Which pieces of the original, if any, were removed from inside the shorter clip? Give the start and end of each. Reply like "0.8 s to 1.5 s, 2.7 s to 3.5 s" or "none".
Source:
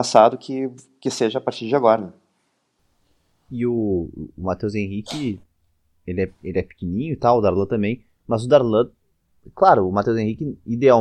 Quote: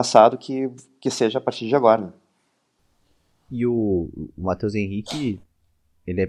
none